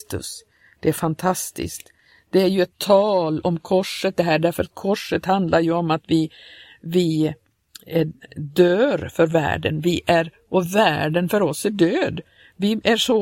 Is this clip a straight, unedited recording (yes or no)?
yes